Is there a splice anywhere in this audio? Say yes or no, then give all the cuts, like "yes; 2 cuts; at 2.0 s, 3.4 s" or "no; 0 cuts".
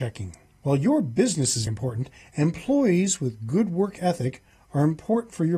yes; 1 cut; at 1.7 s